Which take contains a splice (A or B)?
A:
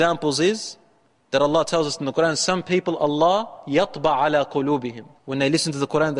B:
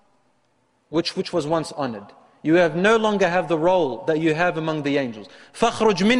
A